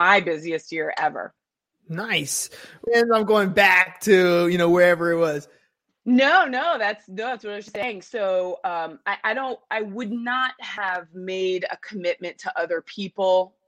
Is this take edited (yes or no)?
yes